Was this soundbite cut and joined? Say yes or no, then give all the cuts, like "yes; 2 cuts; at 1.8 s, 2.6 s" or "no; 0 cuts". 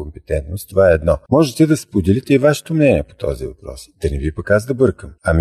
yes; 1 cut; at 1.3 s